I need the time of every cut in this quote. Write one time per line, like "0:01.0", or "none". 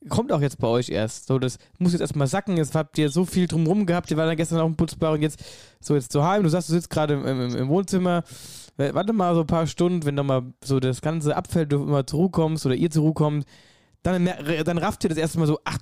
none